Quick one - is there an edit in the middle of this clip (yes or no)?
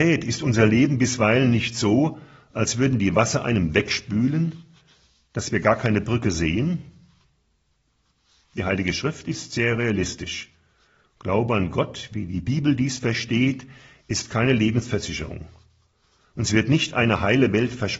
no